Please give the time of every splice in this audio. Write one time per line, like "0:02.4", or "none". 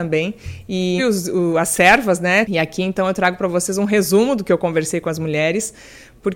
0:01.0
0:02.4